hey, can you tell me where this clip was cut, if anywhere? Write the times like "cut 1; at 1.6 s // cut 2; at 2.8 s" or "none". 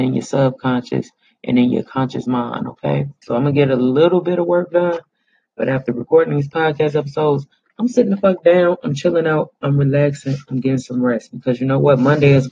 cut 1; at 3.2 s